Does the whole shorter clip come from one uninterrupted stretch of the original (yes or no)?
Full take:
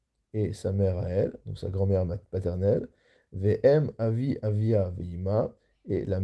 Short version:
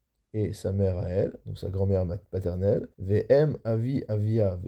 no